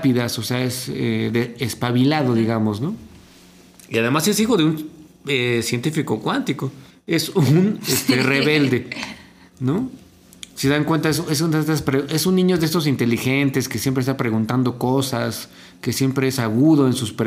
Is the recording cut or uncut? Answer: cut